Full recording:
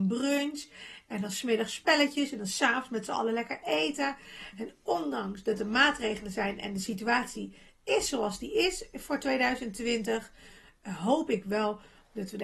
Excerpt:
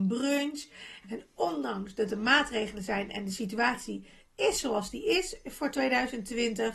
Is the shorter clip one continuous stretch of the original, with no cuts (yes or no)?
no